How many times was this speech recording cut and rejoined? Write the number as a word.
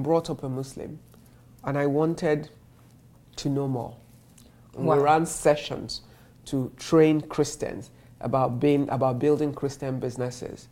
one